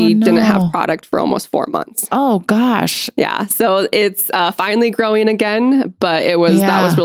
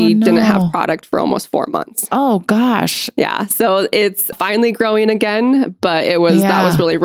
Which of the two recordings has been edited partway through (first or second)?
second